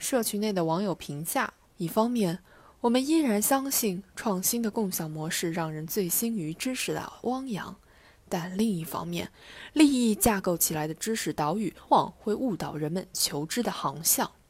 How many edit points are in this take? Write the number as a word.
two